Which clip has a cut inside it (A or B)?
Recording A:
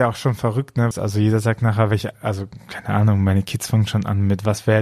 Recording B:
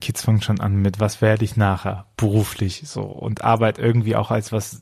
A